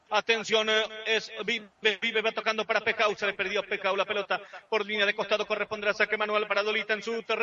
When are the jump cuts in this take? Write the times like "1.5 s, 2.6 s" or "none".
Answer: none